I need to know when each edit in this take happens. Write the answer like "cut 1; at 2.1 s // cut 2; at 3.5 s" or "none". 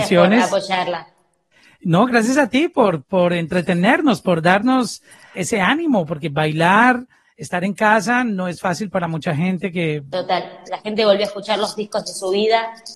cut 1; at 5.3 s // cut 2; at 10.6 s